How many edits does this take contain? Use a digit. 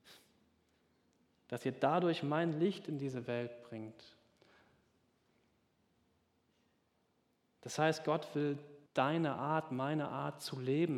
1